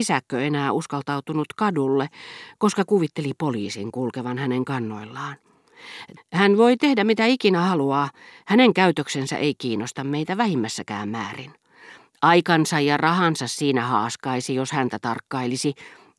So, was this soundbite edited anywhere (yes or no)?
yes